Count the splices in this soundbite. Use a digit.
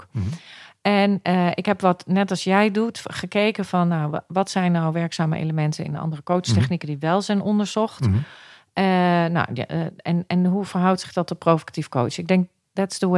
0